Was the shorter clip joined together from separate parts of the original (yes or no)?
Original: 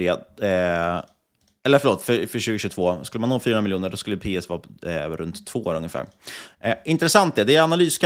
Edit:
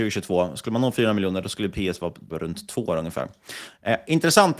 yes